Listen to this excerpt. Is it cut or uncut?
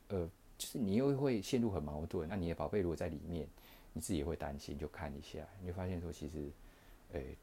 cut